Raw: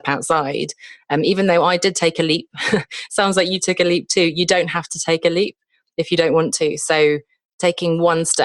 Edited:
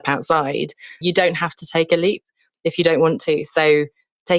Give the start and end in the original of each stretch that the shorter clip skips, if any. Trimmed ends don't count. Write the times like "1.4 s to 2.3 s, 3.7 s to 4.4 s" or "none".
1.0 s to 4.3 s

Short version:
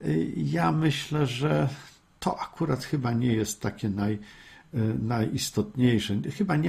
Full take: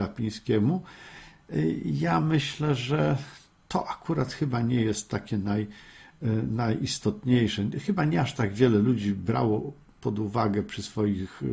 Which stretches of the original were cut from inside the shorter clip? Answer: none

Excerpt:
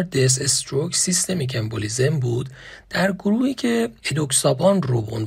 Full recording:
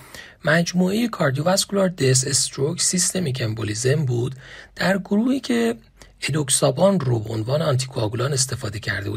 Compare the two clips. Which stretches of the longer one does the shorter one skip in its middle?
5.8 s to 6.2 s

